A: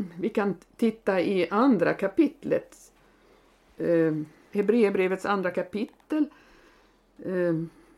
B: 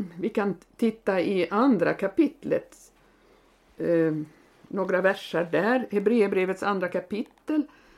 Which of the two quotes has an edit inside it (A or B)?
A